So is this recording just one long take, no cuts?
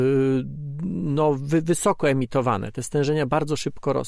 yes; 0 cuts

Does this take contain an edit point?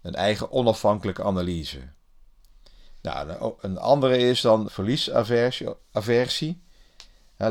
yes; 1 cut; at 4.7 s

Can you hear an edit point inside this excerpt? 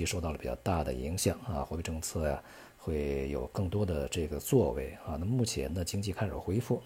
no; 0 cuts

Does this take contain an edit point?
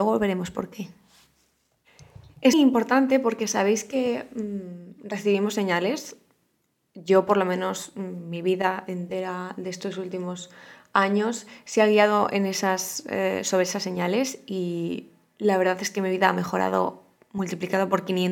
yes; 1 cut; at 2.5 s

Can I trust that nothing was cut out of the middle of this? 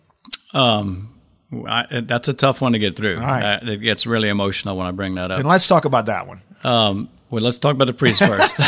yes; 0 cuts

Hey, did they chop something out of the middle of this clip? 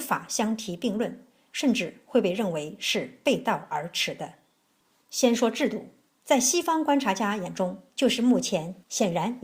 yes; 1 cut; at 7.9 s

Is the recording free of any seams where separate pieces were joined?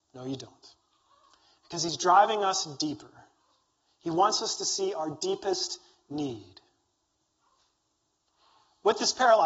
yes; 0 cuts

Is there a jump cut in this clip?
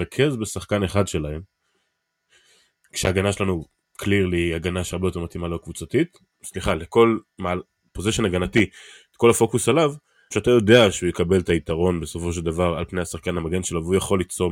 yes; 2 cuts; at 6.3 s, 10.3 s

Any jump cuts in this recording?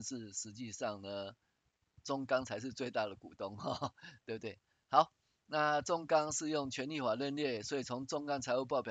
no; 0 cuts

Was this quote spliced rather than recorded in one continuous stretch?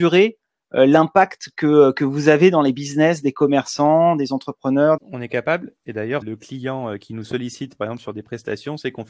yes; 2 cuts; at 5.0 s, 6.2 s

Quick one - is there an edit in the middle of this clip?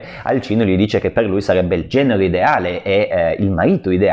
no; 0 cuts

